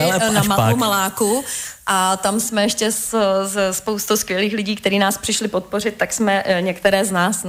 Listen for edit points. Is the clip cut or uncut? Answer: uncut